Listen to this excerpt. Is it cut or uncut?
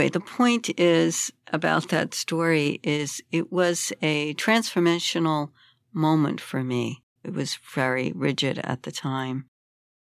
cut